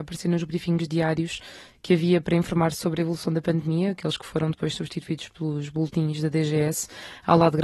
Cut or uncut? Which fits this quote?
uncut